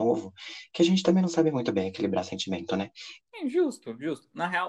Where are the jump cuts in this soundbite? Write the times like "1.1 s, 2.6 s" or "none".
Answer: 3.2 s